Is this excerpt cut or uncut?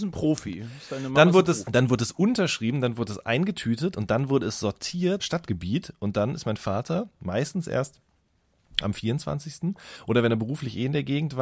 cut